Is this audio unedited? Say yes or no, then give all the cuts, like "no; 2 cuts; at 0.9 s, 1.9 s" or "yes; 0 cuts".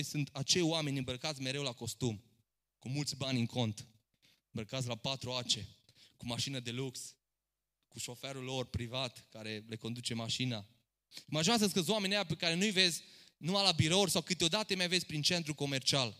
yes; 0 cuts